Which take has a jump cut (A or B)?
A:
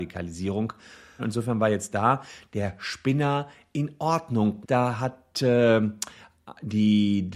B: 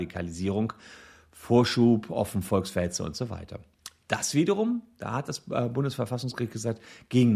A